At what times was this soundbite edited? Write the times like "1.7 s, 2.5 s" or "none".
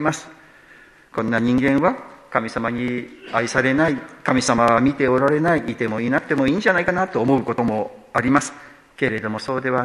none